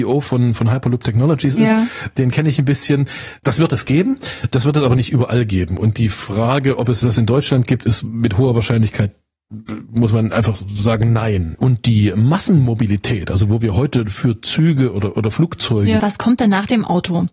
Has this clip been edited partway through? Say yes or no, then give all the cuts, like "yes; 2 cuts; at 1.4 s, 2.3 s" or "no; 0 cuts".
yes; 2 cuts; at 11.5 s, 16.0 s